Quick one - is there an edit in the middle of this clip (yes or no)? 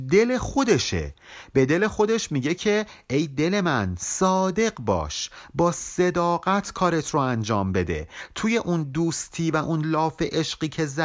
no